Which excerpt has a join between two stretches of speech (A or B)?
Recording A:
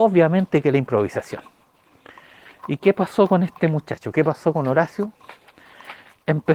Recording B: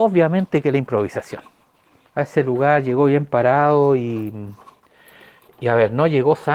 B